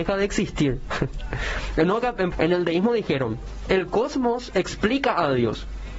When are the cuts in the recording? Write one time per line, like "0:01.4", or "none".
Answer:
0:02.3